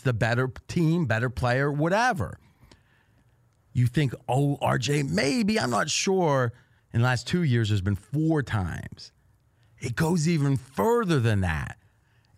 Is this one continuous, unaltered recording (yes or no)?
no